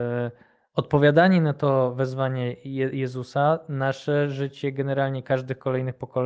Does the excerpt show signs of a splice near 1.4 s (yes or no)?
no